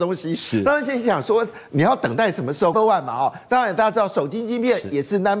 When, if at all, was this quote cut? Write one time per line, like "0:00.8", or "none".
0:02.7